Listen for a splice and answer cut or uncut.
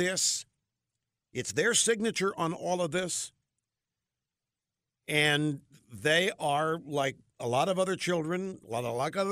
uncut